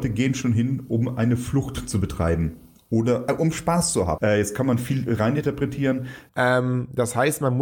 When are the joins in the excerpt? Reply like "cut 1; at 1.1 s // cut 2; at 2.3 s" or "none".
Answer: cut 1; at 4.2 s // cut 2; at 6.3 s